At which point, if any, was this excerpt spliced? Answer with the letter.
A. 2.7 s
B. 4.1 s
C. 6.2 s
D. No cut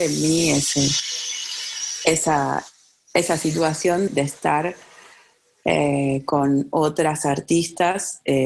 B